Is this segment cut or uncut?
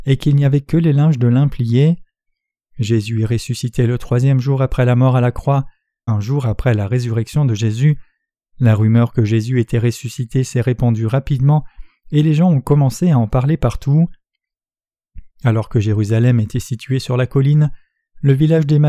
cut